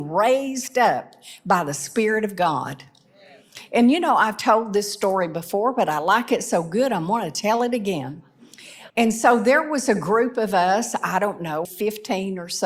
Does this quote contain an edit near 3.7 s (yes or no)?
no